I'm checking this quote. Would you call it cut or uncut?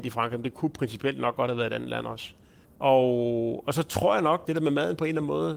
cut